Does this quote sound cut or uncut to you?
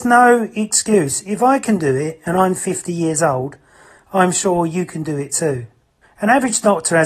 cut